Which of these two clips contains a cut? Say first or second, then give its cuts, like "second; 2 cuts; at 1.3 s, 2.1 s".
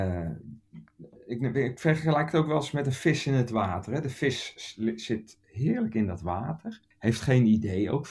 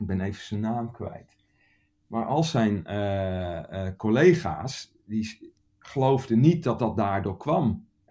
first; 1 cut; at 6.9 s